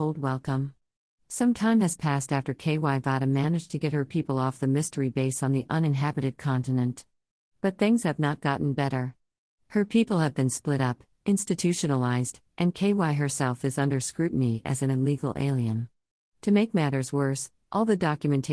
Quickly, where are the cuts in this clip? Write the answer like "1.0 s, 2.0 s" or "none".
none